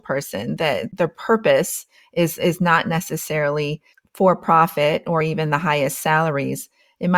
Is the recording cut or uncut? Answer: uncut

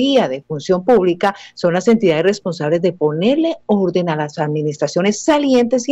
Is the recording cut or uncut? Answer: uncut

